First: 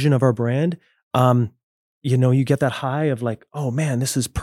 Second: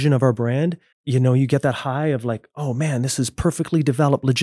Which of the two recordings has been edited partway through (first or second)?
second